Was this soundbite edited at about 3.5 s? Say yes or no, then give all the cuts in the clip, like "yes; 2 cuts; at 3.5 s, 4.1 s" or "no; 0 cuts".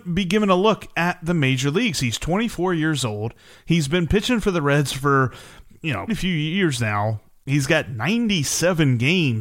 no; 1 cut; at 6.1 s